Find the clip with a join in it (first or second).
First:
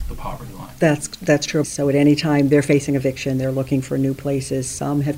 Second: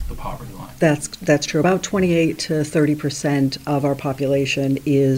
first